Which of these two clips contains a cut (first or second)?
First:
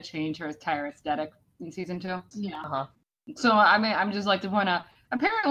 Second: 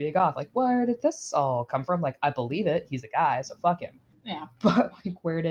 first